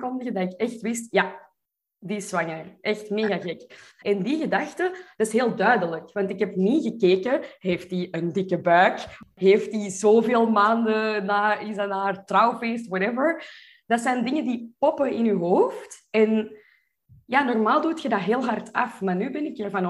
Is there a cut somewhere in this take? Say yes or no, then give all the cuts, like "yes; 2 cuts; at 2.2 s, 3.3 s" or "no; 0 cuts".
yes; 1 cut; at 4.0 s